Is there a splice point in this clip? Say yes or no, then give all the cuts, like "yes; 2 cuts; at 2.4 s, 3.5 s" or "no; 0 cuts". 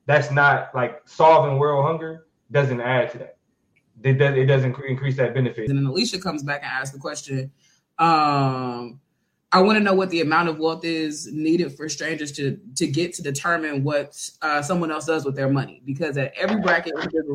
yes; 1 cut; at 5.7 s